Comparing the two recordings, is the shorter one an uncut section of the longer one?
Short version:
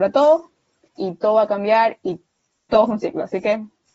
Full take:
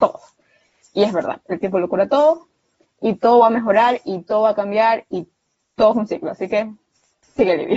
no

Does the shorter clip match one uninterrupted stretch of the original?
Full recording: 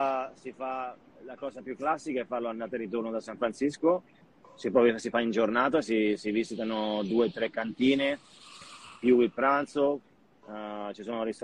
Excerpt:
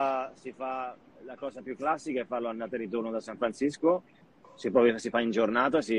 yes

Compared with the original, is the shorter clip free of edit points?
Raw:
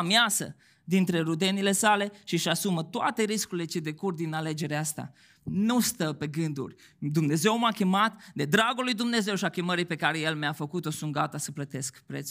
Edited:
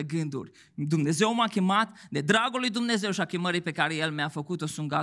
yes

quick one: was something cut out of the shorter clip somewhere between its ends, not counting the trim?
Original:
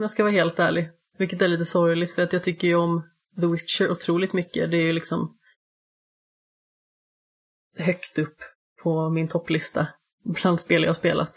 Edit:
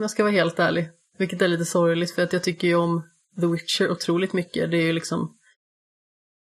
no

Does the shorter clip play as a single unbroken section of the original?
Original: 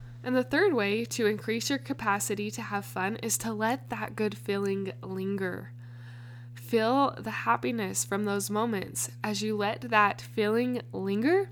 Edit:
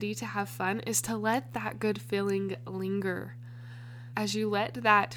no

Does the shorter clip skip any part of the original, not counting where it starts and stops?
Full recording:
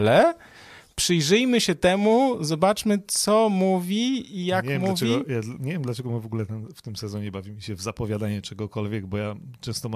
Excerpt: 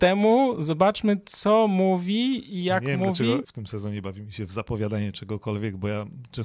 yes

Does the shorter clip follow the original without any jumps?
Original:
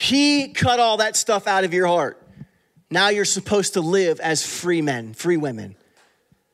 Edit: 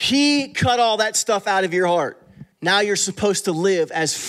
no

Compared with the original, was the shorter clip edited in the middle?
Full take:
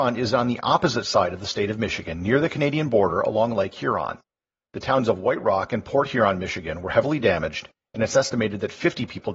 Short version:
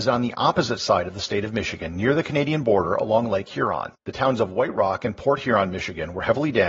yes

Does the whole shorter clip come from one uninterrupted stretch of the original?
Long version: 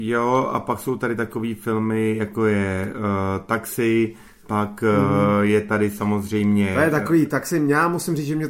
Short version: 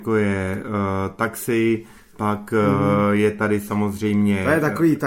yes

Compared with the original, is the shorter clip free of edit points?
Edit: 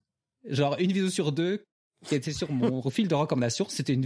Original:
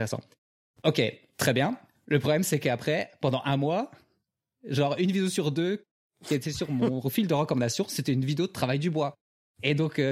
yes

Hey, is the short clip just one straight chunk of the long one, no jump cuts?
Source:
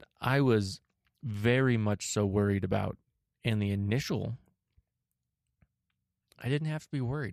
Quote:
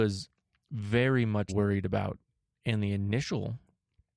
no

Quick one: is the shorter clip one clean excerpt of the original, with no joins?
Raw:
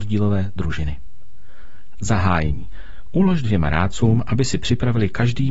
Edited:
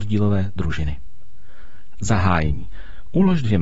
yes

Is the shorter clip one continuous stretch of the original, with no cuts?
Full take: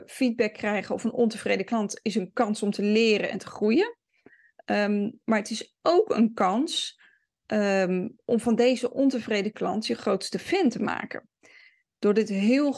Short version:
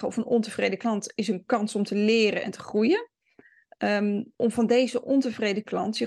no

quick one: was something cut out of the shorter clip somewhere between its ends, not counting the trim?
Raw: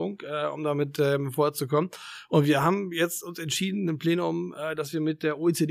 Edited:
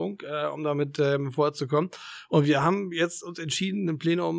no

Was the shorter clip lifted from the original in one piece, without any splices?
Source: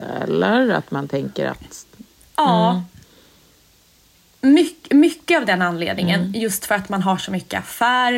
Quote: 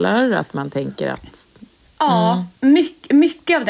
no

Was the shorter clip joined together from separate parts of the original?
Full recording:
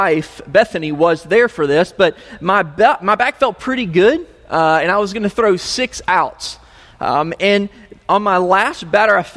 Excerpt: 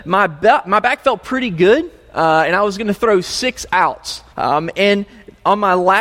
yes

